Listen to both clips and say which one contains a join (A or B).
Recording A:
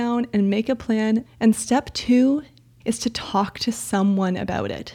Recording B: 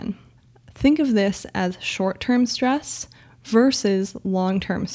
A